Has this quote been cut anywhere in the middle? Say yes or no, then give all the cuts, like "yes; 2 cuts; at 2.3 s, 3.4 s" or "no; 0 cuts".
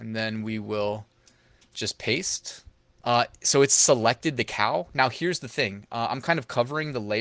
yes; 1 cut; at 3.0 s